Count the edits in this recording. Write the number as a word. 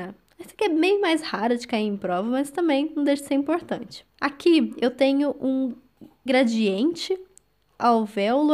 one